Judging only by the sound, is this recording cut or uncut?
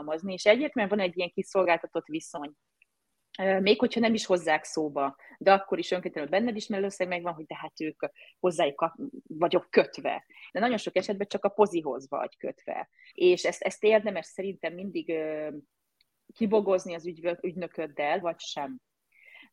cut